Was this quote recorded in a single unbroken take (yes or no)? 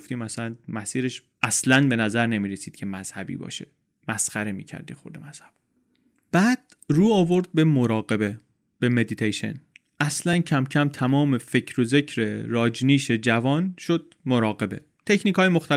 yes